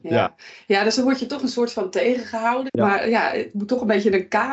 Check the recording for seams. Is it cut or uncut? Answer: cut